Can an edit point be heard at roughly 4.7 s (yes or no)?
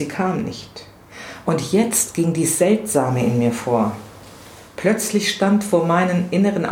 no